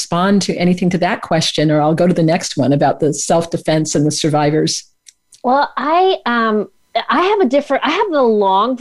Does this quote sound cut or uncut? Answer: uncut